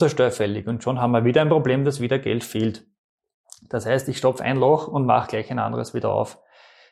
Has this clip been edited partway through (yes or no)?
no